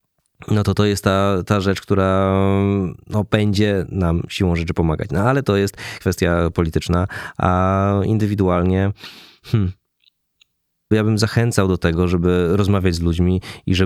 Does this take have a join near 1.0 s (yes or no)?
no